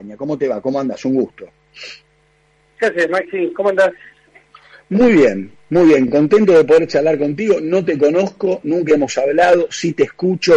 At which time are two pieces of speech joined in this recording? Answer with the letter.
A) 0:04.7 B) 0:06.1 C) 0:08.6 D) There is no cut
D